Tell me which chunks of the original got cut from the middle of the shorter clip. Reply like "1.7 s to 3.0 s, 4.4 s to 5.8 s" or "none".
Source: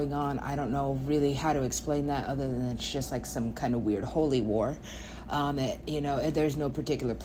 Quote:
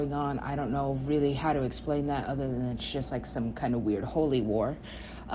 none